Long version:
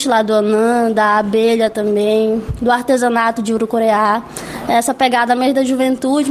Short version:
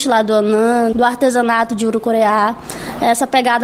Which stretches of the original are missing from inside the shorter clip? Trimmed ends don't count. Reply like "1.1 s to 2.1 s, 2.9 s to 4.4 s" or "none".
0.9 s to 2.6 s